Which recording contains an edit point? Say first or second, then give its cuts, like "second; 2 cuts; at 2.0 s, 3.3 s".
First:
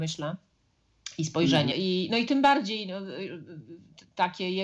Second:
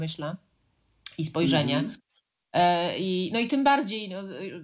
first; 1 cut; at 1.7 s